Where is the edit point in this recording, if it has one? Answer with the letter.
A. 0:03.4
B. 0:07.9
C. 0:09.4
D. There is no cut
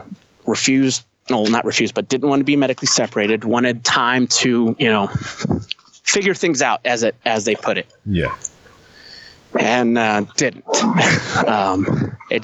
D